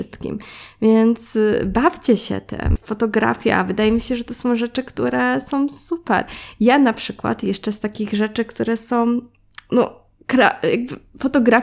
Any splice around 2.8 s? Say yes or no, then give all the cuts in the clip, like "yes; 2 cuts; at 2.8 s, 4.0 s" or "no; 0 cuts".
yes; 1 cut; at 2.8 s